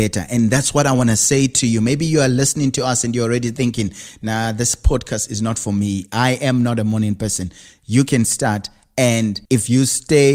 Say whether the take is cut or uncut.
cut